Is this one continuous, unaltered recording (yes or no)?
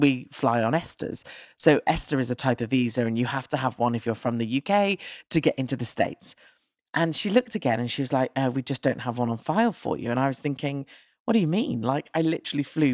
yes